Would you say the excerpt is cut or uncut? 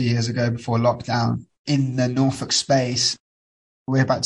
uncut